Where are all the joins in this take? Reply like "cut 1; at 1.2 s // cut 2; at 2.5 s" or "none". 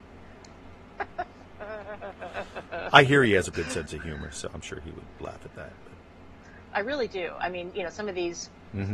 cut 1; at 3.5 s // cut 2; at 5.2 s // cut 3; at 6.6 s